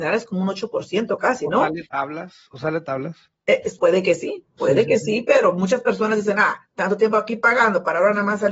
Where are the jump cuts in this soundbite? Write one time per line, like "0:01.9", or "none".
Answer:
0:03.8